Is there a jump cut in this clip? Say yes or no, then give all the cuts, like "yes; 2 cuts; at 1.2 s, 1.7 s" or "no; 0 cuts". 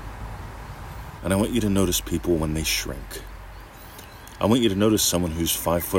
yes; 1 cut; at 1.2 s